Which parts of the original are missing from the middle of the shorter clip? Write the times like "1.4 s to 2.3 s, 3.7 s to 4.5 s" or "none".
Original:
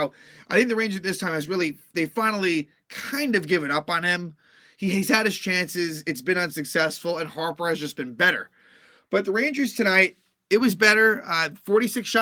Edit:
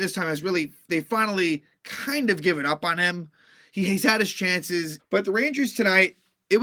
6.0 s to 9.0 s

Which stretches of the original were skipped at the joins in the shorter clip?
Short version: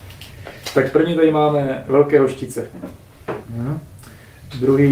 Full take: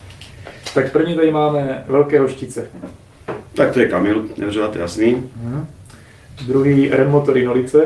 3.4 s to 5.3 s

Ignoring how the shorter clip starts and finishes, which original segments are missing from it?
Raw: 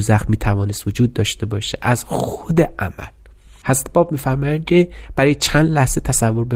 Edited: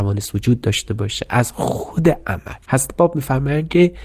3.1 s to 3.6 s

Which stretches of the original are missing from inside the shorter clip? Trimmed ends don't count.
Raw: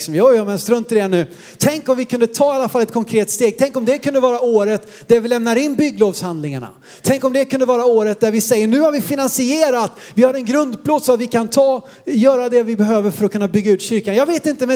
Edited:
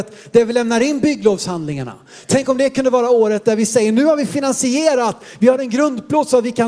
none

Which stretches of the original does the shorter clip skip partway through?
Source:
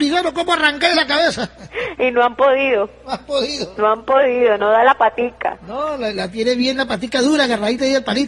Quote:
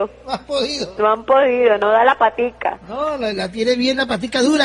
none

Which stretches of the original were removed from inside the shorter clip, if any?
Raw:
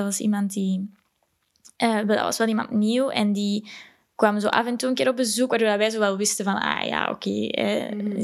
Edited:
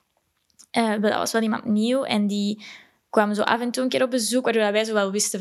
none

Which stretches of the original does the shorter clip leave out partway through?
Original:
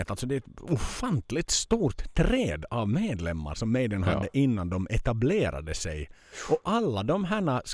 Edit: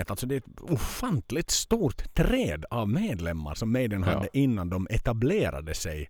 none

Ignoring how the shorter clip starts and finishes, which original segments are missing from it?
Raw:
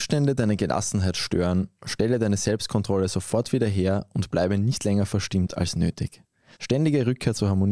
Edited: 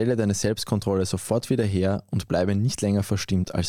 none

